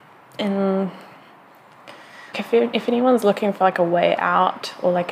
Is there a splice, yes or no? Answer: yes